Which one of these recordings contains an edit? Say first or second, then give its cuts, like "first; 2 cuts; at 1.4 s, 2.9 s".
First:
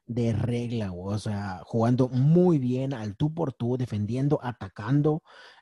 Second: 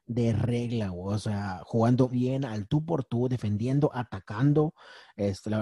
second; 1 cut; at 2.1 s